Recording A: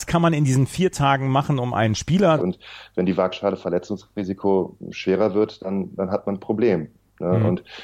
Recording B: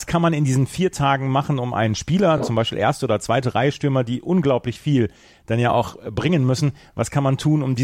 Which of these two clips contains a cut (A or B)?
A